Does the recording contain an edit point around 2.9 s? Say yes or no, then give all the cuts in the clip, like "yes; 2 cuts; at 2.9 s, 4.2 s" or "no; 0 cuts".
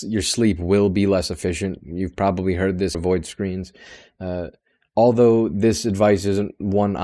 yes; 1 cut; at 2.9 s